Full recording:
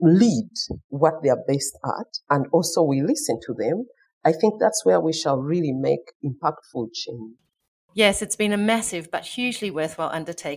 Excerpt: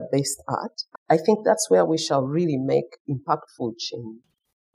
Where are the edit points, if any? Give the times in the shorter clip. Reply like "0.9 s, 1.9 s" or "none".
0.9 s

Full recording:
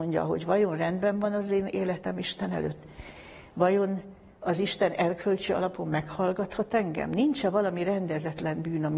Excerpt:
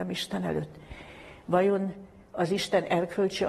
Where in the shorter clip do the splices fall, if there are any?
none

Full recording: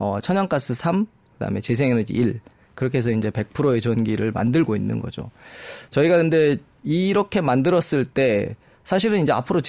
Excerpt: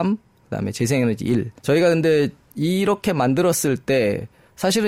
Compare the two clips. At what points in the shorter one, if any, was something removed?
1.6 s

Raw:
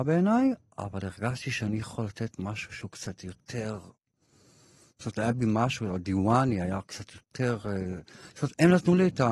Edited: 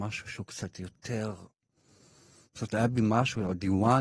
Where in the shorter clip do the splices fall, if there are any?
none

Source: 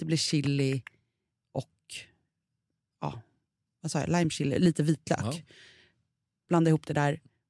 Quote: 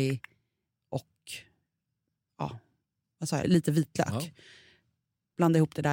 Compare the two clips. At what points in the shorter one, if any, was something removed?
3.4 s

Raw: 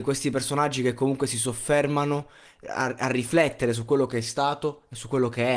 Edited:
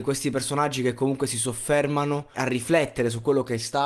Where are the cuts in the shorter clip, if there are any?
2.3 s

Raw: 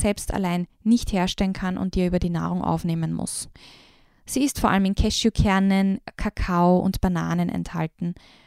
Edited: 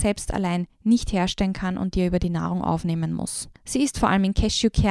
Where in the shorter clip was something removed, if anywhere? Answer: 3.6 s

